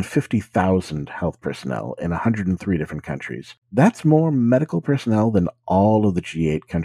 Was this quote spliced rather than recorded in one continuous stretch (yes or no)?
yes